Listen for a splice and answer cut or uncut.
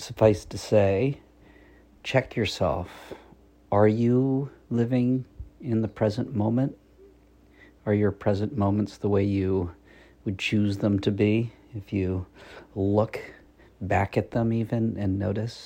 uncut